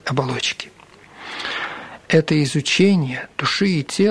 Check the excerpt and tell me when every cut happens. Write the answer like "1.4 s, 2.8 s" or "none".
2.0 s